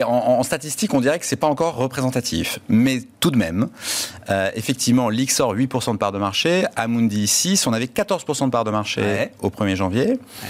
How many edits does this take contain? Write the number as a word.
one